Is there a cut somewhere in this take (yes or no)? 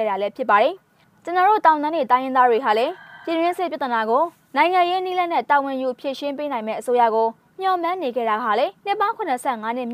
yes